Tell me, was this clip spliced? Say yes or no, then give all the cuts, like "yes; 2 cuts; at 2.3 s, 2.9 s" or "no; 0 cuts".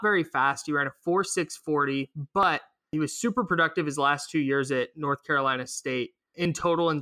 no; 0 cuts